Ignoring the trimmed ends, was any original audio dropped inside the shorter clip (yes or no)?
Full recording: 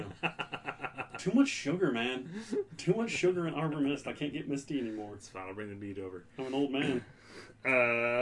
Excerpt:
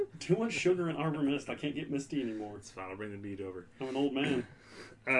no